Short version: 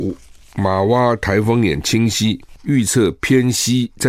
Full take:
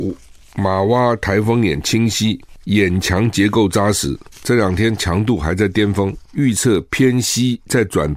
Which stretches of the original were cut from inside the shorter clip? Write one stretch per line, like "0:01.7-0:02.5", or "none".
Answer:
0:02.6-0:06.3